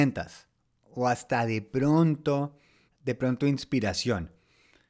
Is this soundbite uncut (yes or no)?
no